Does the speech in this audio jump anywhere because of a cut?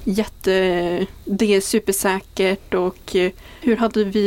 no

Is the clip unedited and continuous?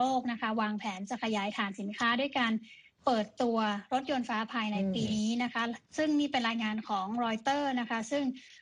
no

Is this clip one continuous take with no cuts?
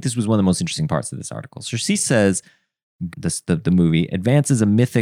no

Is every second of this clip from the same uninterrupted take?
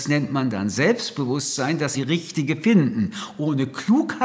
no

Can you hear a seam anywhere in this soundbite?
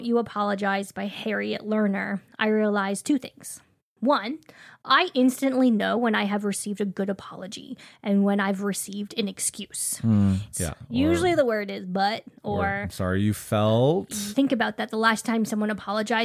yes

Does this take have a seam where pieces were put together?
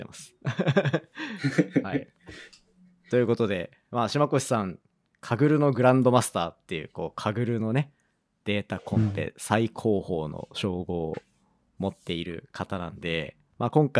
no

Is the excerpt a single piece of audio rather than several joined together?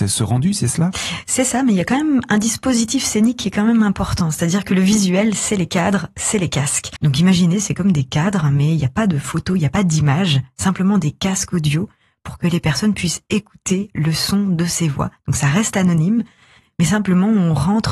no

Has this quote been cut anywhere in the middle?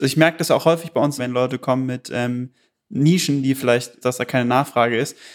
yes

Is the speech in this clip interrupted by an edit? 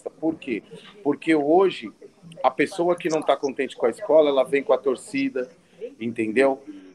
no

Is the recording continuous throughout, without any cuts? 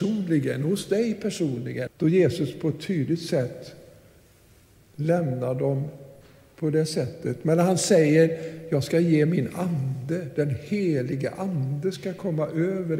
no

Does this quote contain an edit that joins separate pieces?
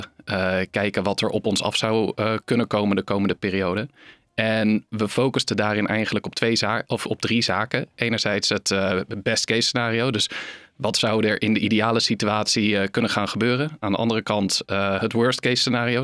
no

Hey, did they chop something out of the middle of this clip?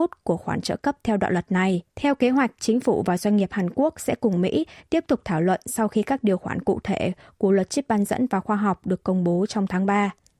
yes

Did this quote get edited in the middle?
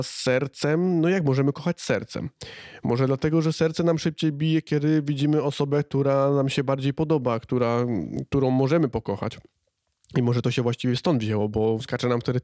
yes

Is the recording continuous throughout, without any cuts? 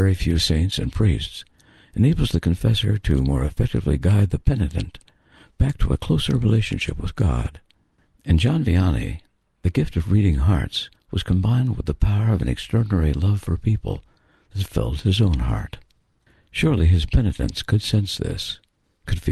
yes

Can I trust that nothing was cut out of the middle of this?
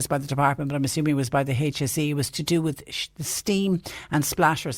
yes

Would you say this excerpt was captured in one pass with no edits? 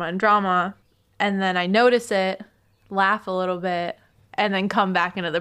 yes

